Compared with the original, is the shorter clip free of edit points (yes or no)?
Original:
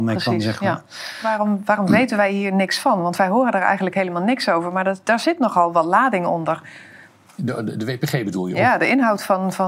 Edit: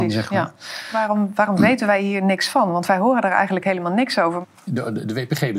no